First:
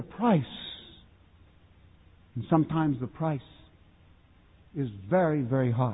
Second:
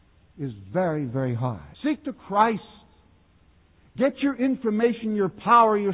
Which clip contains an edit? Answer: second; 1 cut; at 1.7 s

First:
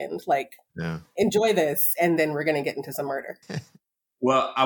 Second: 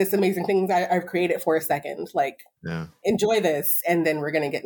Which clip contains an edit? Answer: first; 1 cut; at 3.4 s

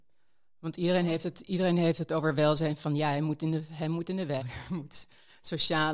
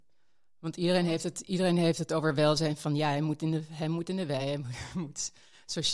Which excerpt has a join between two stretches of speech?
first; 1 cut; at 4.4 s

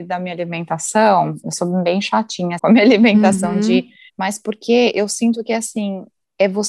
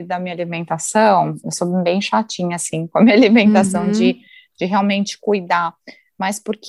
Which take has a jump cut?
first; 2 cuts; at 2.6 s, 4.1 s

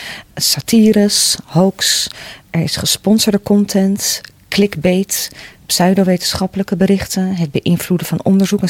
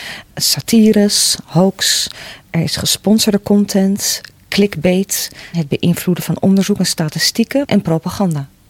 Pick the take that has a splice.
second; 2 cuts; at 5.5 s, 7.6 s

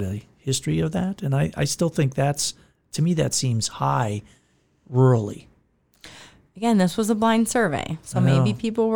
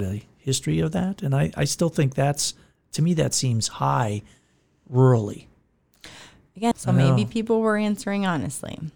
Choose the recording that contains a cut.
second; 1 cut; at 6.7 s

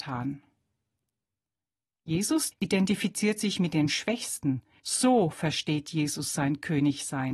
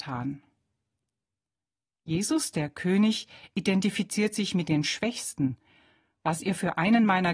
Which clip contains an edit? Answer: first; 2 cuts; at 2.5 s, 4.8 s

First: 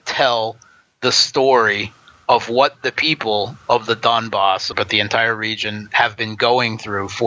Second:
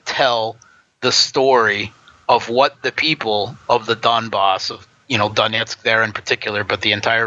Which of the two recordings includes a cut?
first; 1 cut; at 4.7 s

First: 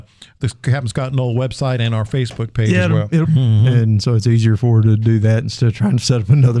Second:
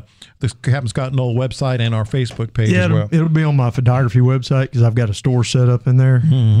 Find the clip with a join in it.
first; 1 cut; at 3.2 s

